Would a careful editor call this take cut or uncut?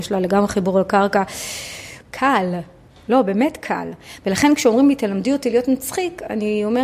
cut